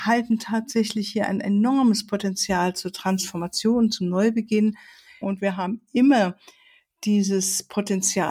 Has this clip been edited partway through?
yes; 1 cut; at 5.2 s

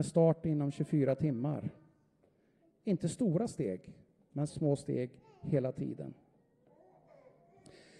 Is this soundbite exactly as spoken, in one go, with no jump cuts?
no; 1 cut; at 4.5 s

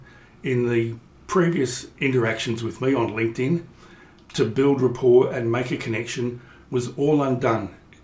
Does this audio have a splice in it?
no; 0 cuts

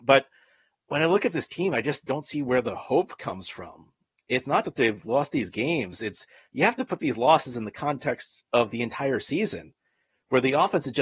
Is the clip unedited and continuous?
no; 1 cut; at 4.6 s

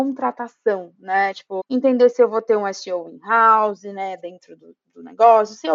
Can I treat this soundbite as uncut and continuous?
no; 1 cut; at 1.6 s

